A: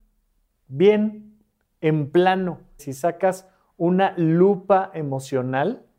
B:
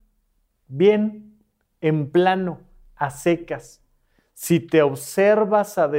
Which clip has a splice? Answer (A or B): A